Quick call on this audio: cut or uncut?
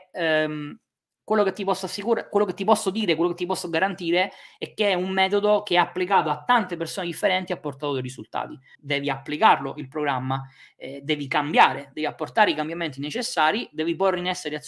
cut